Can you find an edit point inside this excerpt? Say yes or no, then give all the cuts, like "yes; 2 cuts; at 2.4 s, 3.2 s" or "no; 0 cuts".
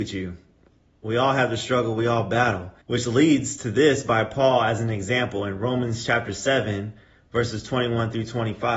yes; 1 cut; at 2.8 s